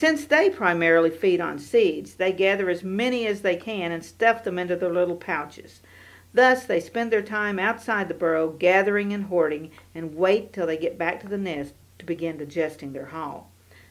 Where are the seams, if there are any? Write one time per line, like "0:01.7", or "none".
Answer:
none